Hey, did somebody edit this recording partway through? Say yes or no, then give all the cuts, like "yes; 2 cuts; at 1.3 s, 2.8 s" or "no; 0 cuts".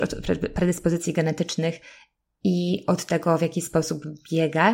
no; 0 cuts